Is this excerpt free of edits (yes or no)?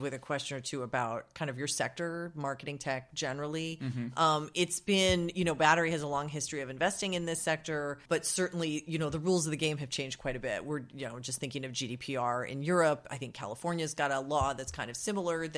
no